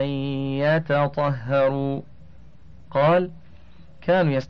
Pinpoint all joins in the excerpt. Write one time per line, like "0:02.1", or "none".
none